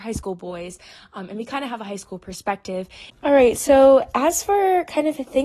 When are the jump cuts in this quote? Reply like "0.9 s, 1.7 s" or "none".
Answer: 3.1 s